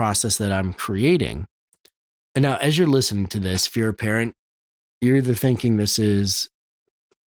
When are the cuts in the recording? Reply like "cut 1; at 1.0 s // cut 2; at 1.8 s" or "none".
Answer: none